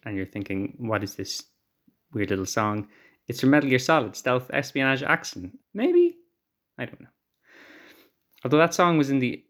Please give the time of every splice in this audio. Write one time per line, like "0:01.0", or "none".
0:05.6